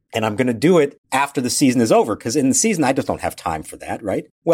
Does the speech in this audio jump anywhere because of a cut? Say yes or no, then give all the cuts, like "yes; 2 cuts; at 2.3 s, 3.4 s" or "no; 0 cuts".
yes; 1 cut; at 1.0 s